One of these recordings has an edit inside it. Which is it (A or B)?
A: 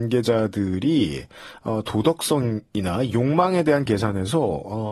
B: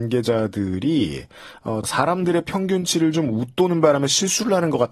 B